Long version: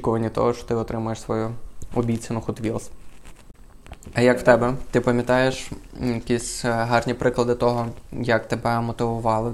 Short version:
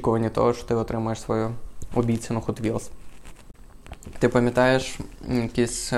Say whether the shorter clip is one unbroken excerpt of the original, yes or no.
no